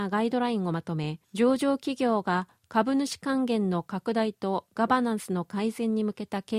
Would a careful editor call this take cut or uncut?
cut